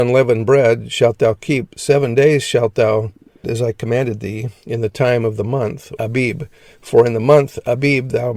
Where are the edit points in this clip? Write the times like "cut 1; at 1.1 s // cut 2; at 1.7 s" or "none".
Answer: cut 1; at 3.4 s // cut 2; at 6.0 s